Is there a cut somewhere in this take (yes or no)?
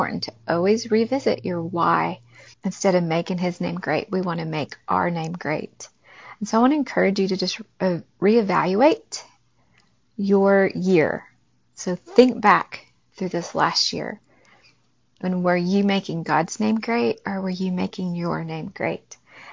yes